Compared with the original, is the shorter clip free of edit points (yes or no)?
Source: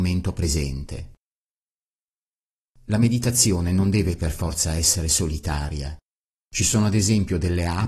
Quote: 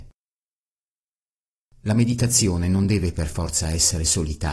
yes